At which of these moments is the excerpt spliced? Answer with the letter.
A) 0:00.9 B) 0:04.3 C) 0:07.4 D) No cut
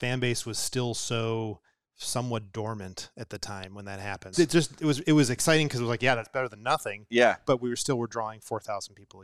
B